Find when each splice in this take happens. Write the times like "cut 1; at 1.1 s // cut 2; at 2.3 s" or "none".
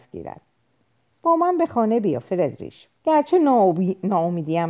cut 1; at 2.9 s